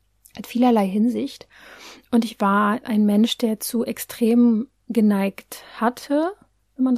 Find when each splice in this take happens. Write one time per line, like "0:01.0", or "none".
none